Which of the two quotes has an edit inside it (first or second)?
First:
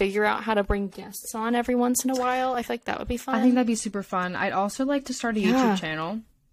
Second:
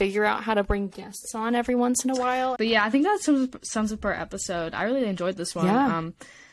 second